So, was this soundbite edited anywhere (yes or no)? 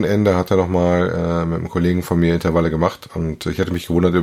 no